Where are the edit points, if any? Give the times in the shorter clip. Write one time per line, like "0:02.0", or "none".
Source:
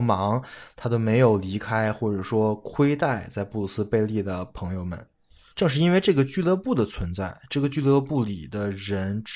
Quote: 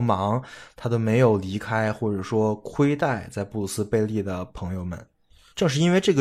none